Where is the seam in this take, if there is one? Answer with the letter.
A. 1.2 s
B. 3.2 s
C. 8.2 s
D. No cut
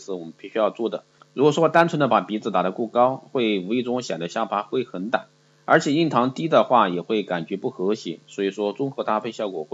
A